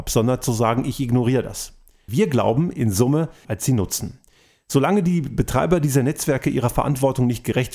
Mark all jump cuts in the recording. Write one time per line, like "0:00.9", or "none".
0:02.1
0:03.4